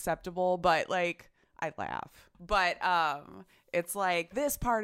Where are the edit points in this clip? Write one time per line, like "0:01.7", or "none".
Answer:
0:02.3